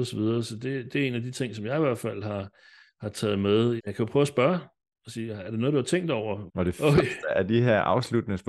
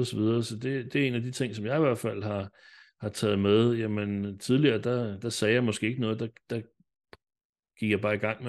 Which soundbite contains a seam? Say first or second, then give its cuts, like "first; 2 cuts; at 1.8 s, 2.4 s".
first; 2 cuts; at 3.8 s, 6.5 s